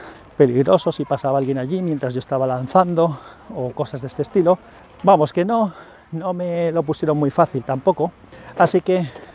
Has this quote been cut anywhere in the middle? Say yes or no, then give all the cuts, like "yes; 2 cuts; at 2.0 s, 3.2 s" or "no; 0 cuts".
no; 0 cuts